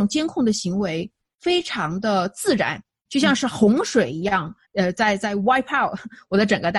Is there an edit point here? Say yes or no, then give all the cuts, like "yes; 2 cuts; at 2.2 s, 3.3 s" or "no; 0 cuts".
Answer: yes; 2 cuts; at 3.0 s, 4.6 s